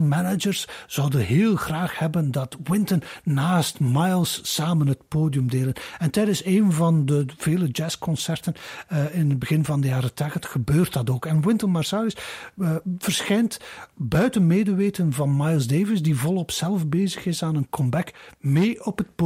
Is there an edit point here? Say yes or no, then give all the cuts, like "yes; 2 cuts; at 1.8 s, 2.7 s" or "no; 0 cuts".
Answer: no; 0 cuts